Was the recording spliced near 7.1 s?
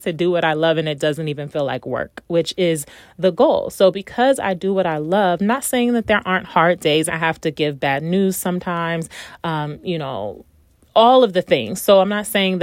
yes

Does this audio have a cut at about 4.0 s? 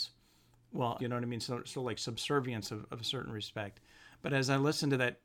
no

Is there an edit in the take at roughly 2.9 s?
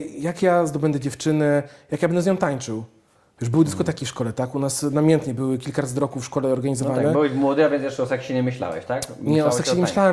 no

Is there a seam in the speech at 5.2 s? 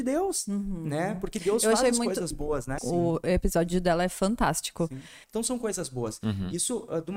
yes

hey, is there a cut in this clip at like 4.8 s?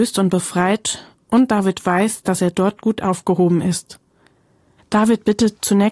yes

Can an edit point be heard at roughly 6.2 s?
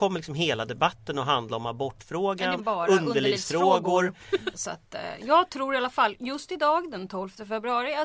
no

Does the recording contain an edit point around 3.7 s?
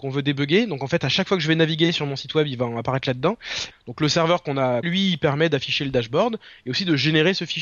yes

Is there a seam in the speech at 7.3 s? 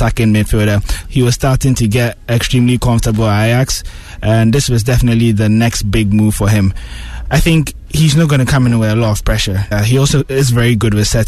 no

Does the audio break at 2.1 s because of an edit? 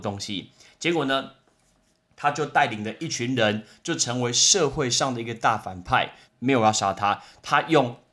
no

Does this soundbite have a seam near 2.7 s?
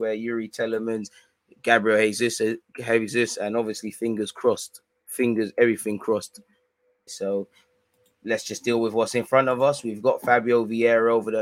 no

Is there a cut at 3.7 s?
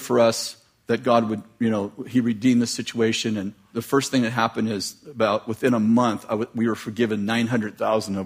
yes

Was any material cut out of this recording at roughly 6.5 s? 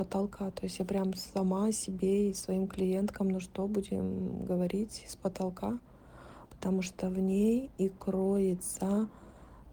yes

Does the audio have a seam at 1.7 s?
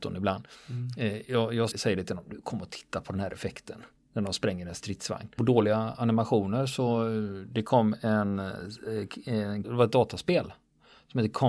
yes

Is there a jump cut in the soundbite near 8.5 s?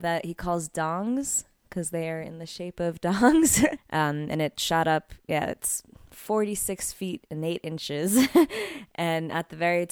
no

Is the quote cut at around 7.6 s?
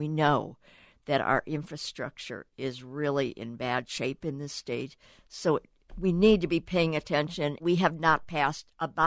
yes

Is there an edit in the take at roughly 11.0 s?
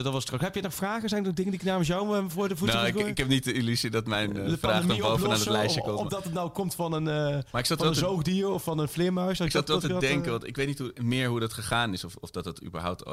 yes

